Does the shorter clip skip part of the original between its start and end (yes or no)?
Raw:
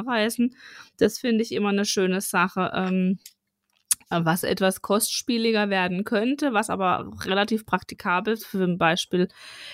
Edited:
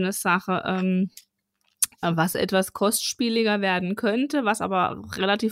no